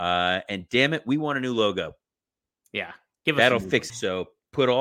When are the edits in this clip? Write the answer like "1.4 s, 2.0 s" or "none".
3.9 s